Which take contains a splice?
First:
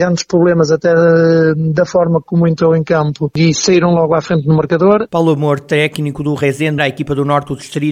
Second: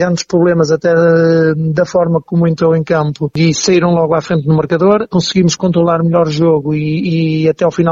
first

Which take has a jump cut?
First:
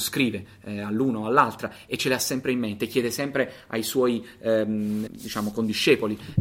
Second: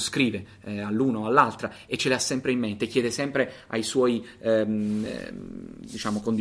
first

